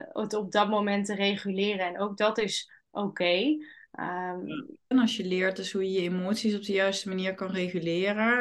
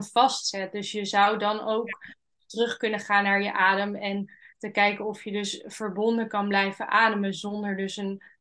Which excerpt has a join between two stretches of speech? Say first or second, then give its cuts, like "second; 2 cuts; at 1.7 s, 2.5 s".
first; 1 cut; at 4.9 s